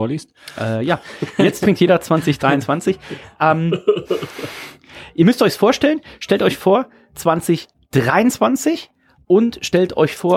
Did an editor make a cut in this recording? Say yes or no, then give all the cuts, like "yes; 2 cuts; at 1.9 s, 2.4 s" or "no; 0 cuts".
yes; 1 cut; at 9.2 s